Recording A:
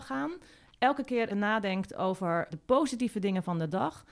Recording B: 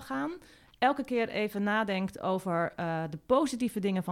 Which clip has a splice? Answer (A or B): A